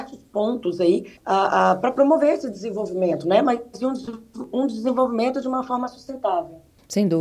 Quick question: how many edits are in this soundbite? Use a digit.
1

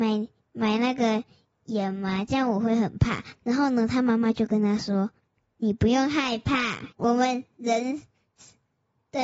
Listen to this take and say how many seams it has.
2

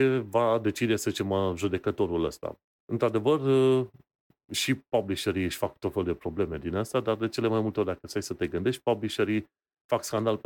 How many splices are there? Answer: 1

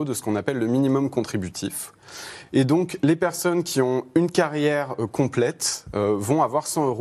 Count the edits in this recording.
0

